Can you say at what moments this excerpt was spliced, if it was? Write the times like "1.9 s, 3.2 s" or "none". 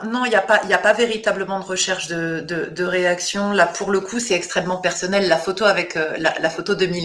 none